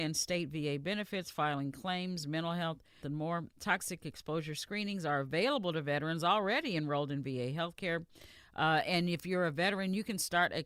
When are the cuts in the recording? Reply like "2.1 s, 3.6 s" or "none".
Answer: 3.0 s